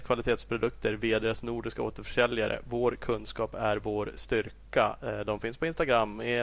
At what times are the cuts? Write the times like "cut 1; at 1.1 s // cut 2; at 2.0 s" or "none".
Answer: none